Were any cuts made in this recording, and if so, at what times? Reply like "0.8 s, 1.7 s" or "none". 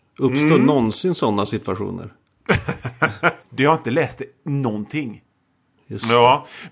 3.4 s, 5.8 s